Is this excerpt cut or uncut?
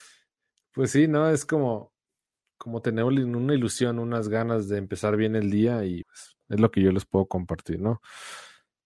cut